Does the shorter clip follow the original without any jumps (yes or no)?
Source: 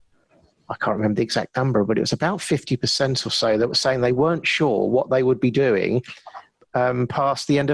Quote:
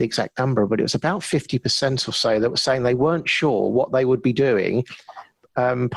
yes